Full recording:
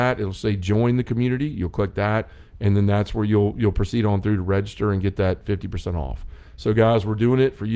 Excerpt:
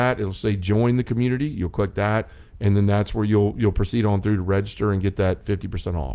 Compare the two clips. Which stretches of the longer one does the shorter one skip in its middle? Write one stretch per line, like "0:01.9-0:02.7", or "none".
none